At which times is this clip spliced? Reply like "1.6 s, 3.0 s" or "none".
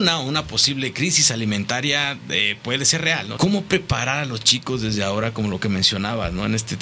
3.4 s